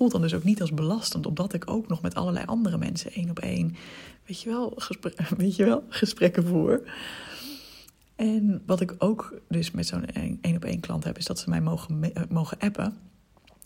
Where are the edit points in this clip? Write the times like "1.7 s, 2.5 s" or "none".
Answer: 8.7 s